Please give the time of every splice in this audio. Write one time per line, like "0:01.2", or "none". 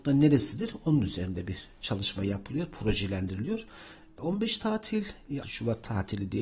0:05.4